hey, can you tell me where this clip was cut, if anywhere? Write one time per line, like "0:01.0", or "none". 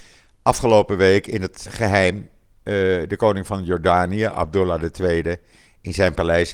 0:01.7